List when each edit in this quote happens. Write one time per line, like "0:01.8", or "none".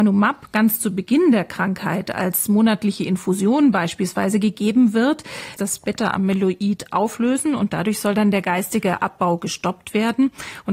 0:05.6